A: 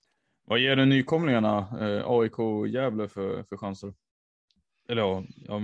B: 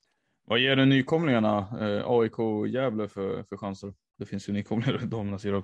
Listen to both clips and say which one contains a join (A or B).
B